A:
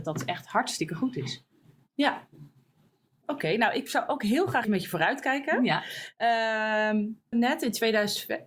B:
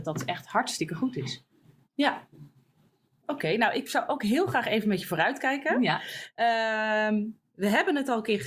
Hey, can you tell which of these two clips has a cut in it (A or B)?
A